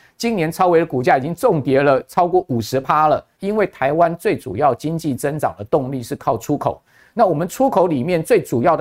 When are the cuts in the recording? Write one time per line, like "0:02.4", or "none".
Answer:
0:03.4